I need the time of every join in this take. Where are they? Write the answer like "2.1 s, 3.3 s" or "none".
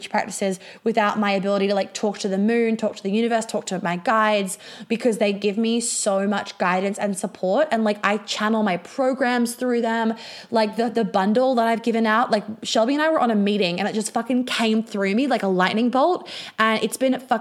none